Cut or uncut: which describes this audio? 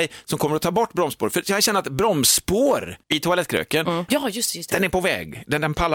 cut